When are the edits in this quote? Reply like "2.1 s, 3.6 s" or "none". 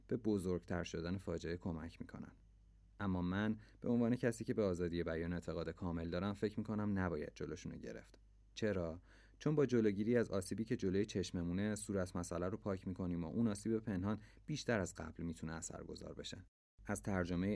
none